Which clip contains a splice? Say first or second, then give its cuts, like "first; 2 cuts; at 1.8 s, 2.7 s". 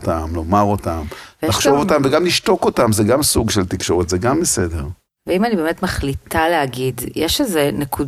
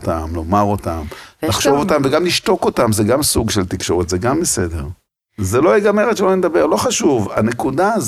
second; 1 cut; at 5.1 s